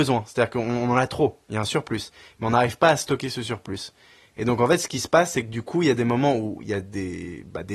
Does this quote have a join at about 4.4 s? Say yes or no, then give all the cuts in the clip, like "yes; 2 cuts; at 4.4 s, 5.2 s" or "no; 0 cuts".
no; 0 cuts